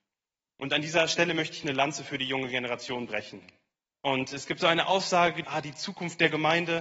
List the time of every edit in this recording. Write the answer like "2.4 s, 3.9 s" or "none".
3.9 s, 5.4 s